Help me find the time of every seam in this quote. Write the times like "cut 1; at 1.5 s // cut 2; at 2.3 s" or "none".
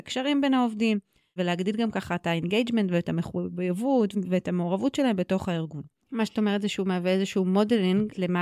cut 1; at 6.0 s